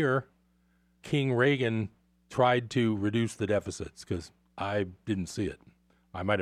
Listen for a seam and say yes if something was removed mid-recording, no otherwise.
yes